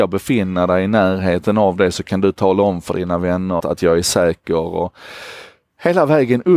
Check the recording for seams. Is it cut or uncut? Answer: cut